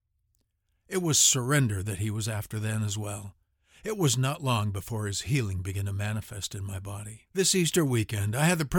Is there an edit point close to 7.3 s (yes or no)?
yes